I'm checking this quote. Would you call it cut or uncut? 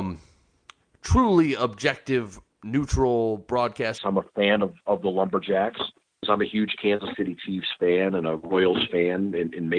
cut